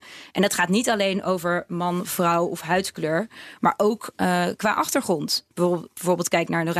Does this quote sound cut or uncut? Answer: cut